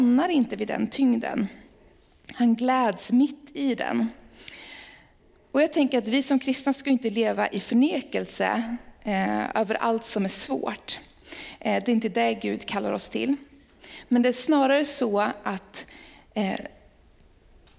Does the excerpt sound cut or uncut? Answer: uncut